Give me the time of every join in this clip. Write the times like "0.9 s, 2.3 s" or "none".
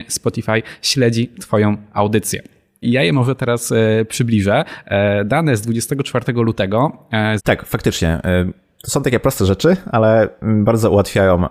2.8 s, 7.4 s

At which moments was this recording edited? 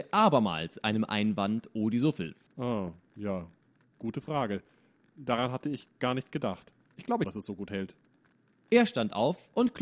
2.5 s, 7.2 s

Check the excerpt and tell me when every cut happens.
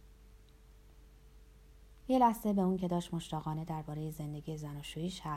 2.0 s

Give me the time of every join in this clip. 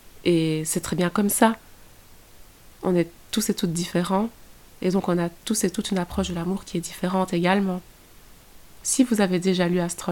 8.8 s

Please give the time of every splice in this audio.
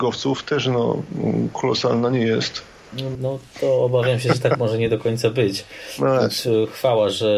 3.1 s

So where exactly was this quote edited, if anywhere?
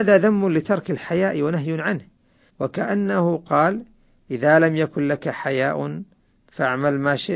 2.5 s

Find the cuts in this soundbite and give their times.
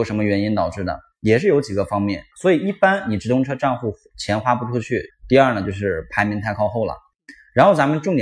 2.3 s, 5.1 s

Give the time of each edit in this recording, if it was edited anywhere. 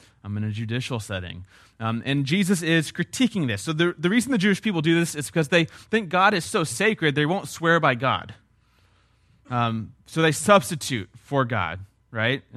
none

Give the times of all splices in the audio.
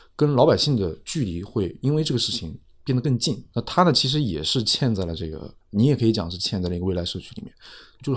3.5 s, 5.6 s

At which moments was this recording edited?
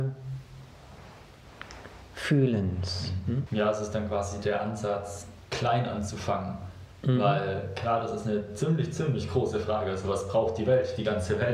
3.5 s

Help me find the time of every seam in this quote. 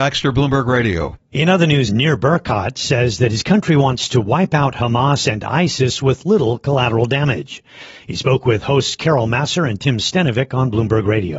1.9 s

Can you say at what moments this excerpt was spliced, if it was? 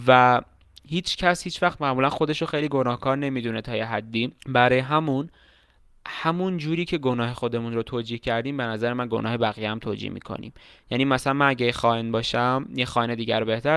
4.4 s

